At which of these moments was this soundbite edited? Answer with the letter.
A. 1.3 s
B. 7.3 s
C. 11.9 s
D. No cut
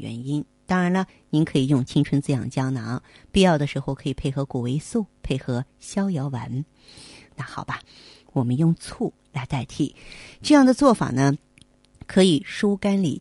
B